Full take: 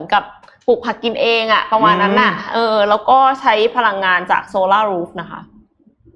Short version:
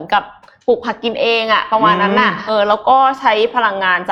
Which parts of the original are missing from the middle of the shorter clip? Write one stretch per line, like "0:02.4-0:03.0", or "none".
0:02.5-0:02.7